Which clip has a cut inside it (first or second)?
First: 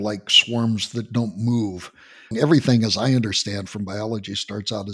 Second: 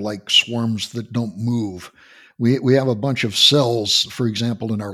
first